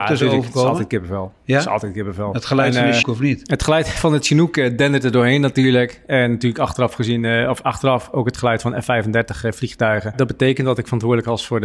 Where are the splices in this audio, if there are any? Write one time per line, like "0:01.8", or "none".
0:03.0
0:10.1